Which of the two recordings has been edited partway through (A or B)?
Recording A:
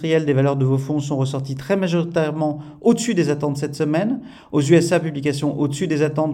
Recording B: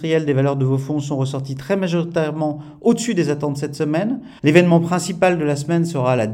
B